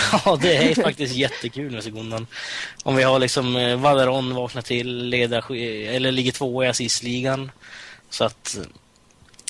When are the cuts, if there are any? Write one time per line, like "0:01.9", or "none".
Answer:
0:08.0